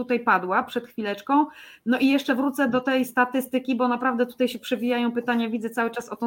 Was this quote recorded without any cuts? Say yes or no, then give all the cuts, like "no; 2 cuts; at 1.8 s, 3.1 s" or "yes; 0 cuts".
yes; 0 cuts